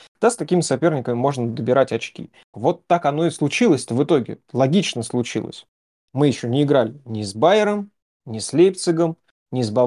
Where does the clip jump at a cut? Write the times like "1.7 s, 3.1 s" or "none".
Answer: 2.5 s, 6.0 s